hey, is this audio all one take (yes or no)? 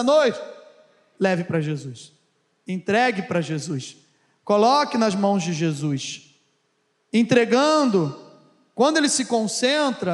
yes